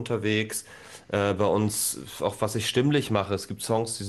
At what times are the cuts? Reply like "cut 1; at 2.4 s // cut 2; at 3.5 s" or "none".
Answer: none